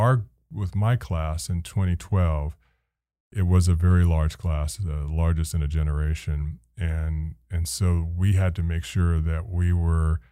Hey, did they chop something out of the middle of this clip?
no; 0 cuts

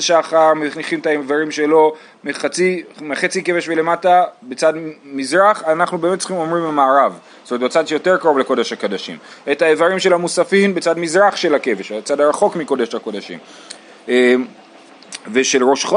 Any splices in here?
no; 0 cuts

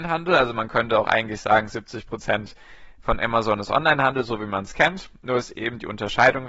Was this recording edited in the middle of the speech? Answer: no; 0 cuts

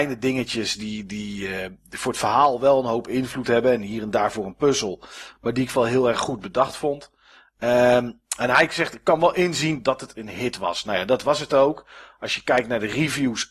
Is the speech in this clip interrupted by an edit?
no; 0 cuts

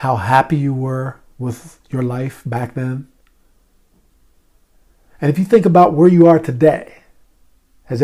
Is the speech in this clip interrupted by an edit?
no; 0 cuts

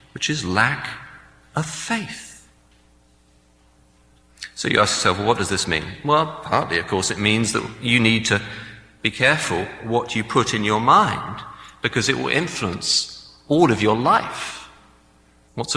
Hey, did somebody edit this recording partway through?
no; 0 cuts

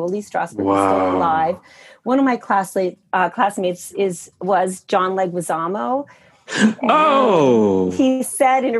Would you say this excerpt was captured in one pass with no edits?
yes; 0 cuts

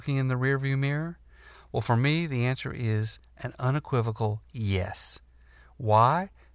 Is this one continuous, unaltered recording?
yes; 0 cuts

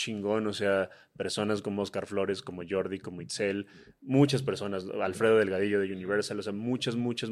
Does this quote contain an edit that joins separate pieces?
no; 0 cuts

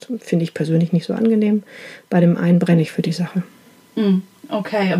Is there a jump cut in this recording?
no; 0 cuts

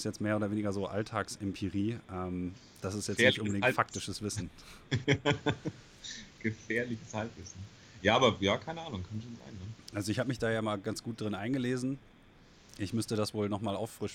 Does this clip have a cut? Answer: no; 0 cuts

